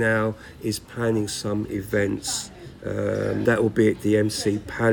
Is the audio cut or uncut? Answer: cut